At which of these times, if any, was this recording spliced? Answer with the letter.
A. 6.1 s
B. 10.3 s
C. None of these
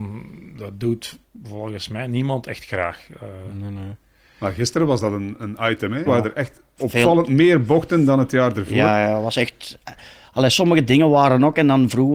A